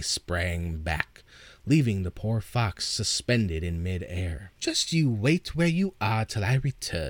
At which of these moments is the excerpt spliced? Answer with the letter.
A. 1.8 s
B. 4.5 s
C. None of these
B